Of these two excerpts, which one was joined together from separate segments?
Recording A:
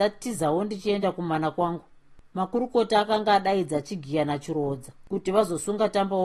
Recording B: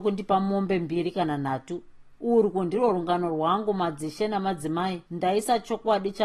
B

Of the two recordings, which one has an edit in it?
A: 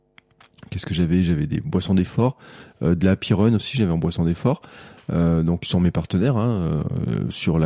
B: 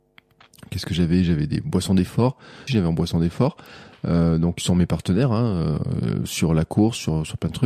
B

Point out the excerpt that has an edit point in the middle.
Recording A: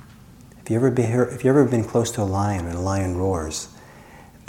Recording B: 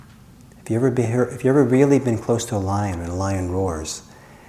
A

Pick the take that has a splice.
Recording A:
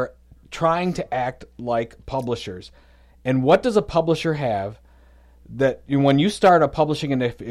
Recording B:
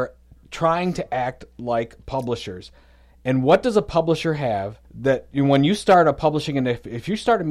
B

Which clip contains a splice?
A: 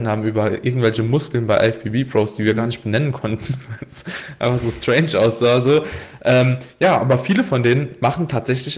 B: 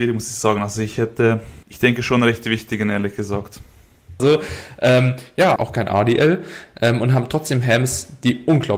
B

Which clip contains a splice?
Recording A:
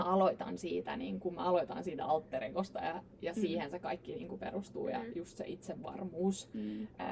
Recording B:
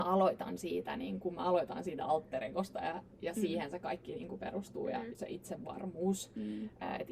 B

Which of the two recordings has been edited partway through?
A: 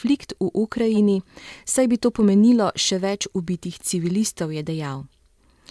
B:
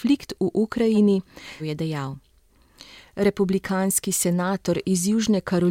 B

